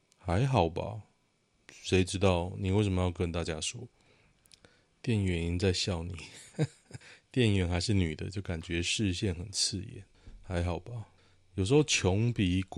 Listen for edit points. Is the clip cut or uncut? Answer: uncut